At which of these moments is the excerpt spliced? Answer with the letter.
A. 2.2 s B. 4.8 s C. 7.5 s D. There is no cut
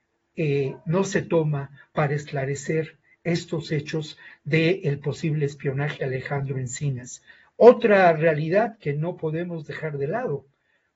D